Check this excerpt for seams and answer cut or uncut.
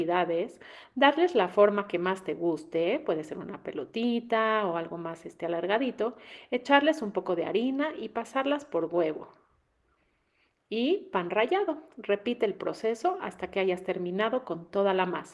uncut